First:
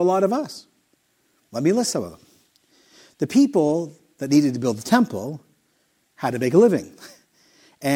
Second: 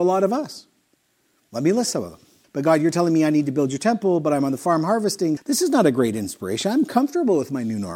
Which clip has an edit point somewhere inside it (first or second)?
second